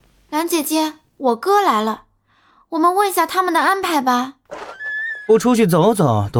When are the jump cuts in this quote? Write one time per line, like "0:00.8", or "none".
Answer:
none